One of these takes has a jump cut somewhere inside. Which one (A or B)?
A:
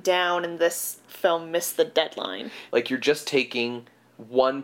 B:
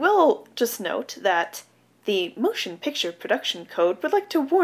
A